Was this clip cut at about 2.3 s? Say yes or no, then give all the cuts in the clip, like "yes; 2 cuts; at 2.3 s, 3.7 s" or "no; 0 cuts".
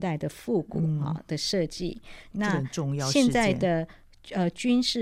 yes; 1 cut; at 2.3 s